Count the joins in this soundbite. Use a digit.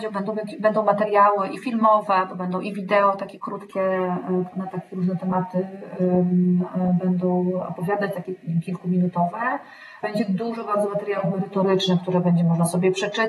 1